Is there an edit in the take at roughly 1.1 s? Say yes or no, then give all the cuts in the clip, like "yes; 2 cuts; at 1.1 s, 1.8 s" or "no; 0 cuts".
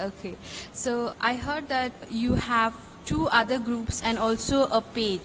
yes; 1 cut; at 1.1 s